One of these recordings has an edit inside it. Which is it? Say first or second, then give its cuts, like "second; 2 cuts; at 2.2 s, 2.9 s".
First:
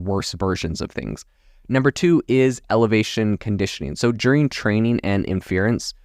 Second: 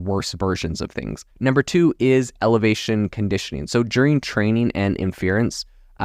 second; 1 cut; at 1.3 s